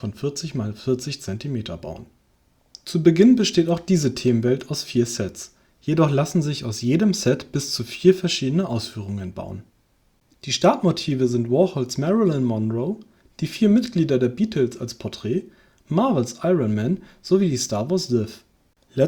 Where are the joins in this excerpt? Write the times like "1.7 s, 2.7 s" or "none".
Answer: none